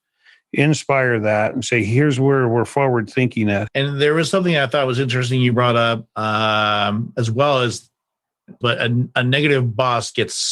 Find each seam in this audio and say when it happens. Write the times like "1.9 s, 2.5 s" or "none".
3.7 s, 8.6 s